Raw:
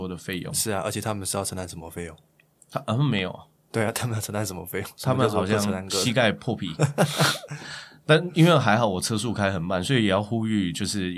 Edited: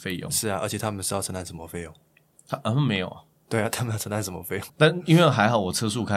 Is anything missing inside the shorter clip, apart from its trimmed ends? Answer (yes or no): yes